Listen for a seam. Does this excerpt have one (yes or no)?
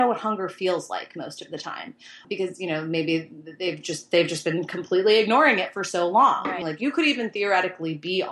yes